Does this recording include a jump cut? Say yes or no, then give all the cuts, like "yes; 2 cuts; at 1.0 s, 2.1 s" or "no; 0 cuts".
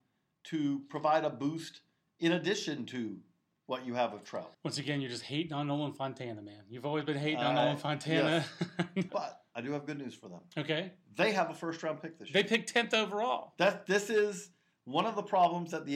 yes; 2 cuts; at 4.5 s, 9.1 s